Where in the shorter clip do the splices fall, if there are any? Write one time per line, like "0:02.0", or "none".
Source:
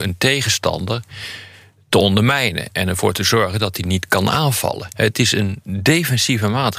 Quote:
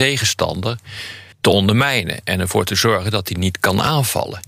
0:01.3

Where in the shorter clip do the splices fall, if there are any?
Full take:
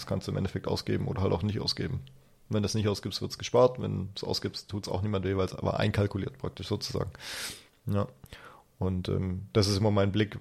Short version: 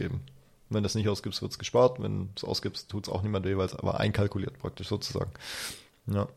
none

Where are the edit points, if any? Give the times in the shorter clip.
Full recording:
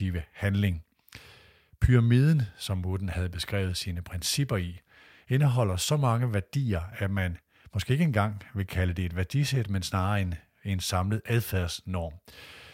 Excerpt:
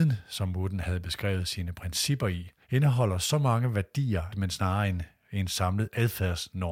0:02.6
0:04.3

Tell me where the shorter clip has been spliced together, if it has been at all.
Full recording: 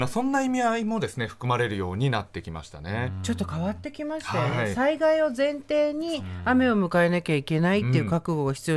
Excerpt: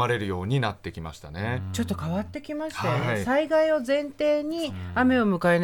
none

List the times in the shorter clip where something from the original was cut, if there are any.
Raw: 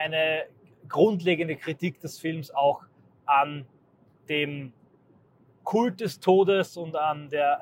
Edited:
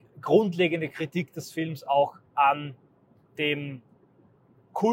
0:02.3

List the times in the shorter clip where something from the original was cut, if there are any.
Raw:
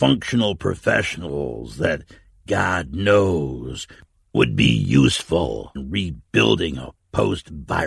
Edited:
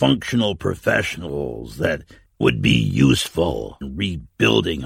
0:02.3

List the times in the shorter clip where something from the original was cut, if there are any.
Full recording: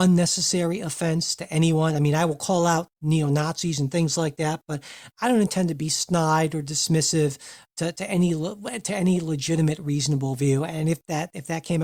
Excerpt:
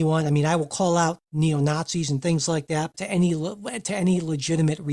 0:02.9

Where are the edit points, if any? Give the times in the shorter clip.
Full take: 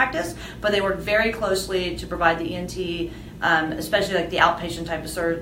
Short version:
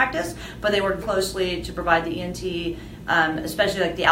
0:01.0

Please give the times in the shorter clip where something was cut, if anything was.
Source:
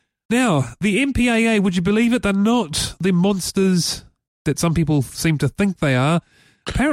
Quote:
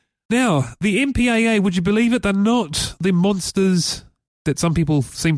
none

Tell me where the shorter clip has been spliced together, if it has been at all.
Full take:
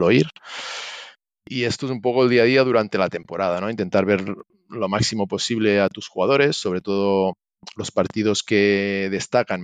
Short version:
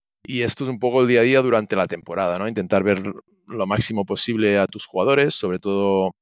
none

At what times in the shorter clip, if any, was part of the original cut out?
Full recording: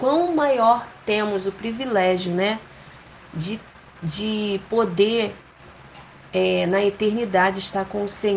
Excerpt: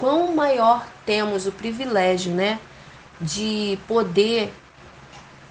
0:03.0

